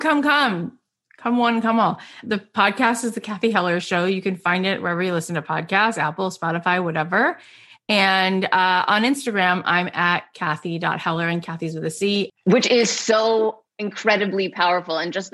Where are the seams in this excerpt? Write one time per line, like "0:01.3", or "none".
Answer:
0:12.3

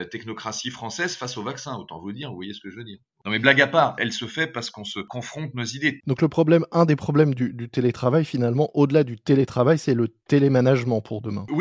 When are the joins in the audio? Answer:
0:04.0
0:06.0

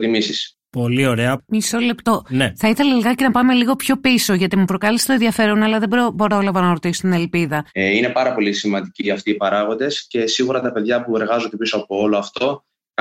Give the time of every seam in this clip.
0:07.7

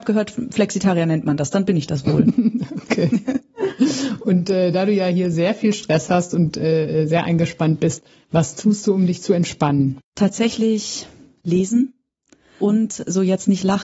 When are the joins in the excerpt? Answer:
0:10.1
0:12.6

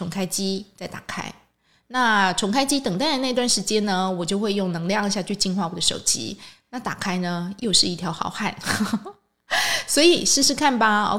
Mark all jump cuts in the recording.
none

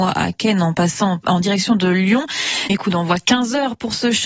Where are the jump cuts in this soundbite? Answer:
0:02.7

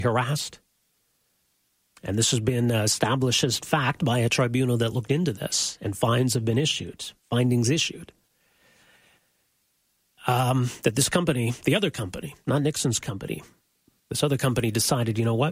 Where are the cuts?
none

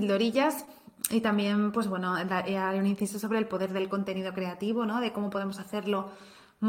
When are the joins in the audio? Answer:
none

